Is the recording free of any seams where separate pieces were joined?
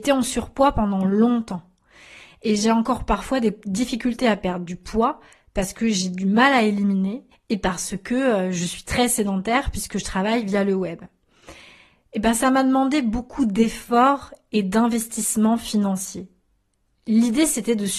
no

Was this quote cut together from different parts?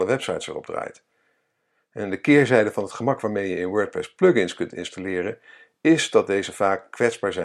no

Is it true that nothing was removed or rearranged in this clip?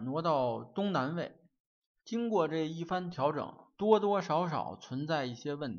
no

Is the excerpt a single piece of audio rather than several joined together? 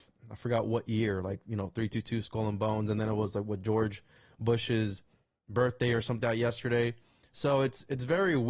no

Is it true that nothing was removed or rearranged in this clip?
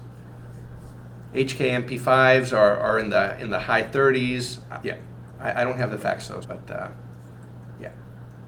no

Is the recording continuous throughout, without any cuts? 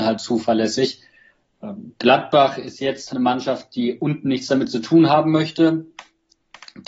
no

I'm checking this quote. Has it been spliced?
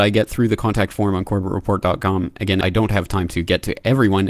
no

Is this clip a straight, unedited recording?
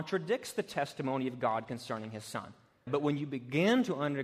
no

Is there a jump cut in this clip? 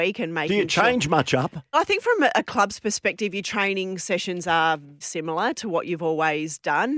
yes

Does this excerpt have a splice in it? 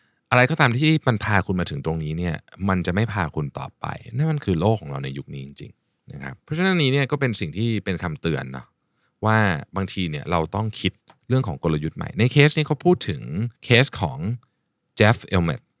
yes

